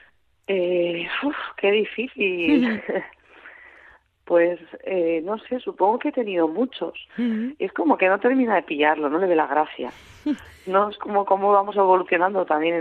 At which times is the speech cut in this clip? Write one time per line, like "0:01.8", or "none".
0:07.1